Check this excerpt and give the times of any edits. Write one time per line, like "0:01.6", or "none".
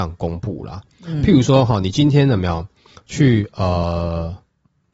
none